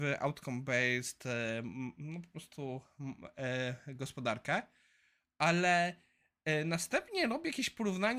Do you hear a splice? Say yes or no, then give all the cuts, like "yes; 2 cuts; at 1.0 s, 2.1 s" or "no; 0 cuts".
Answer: no; 0 cuts